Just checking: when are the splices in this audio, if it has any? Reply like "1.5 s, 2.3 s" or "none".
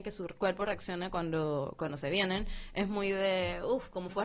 none